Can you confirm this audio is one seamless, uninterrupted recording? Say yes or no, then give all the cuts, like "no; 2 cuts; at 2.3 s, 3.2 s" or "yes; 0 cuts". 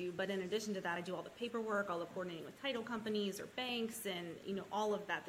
yes; 0 cuts